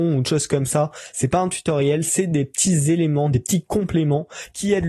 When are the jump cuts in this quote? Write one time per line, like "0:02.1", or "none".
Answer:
none